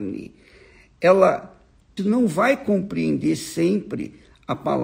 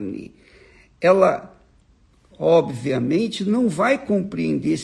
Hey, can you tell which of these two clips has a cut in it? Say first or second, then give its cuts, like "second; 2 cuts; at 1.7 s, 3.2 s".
first; 1 cut; at 2.0 s